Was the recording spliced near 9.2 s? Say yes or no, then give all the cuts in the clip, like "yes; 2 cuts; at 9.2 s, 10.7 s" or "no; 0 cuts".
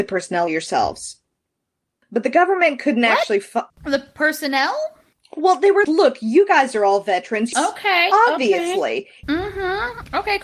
yes; 3 cuts; at 5.8 s, 7.5 s, 9.2 s